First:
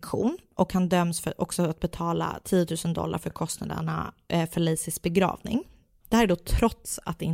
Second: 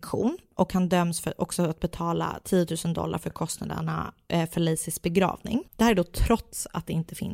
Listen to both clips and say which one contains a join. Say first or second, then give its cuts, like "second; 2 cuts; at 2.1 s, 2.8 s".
second; 1 cut; at 5.7 s